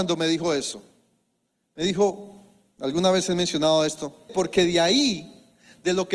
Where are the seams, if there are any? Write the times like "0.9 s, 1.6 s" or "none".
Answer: 4.3 s